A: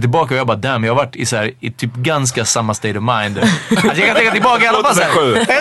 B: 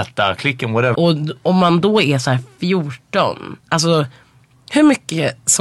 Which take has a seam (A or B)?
B